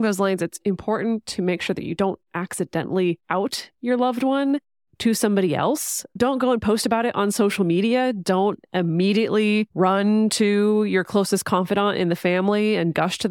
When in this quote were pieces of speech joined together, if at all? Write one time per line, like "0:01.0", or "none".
none